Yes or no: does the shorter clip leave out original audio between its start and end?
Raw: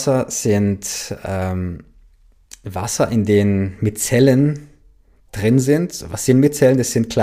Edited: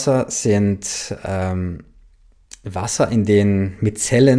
no